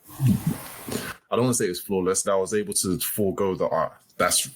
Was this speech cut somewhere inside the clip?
yes; 1 cut; at 2.2 s

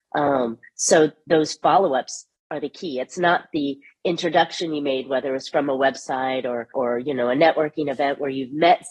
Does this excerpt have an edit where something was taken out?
yes; 1 cut; at 6.7 s

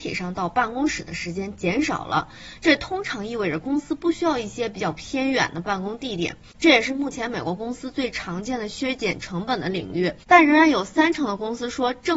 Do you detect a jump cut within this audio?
yes; 1 cut; at 6.5 s

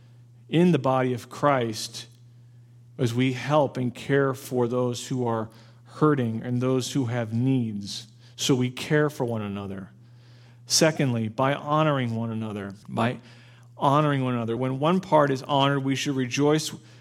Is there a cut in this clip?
yes; 2 cuts; at 12.8 s, 14.6 s

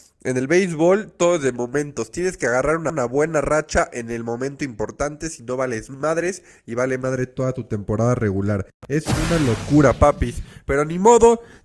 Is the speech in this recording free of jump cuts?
yes; 0 cuts

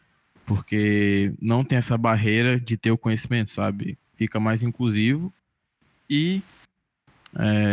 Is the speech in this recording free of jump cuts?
yes; 0 cuts

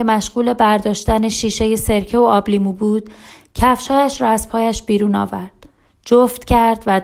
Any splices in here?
no; 0 cuts

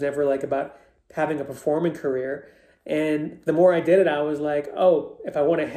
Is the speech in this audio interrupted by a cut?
no; 0 cuts

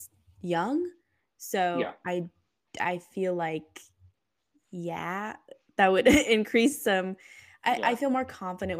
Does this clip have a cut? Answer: no; 0 cuts

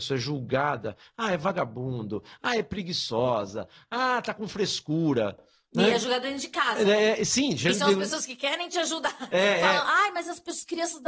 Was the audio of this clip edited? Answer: no; 0 cuts

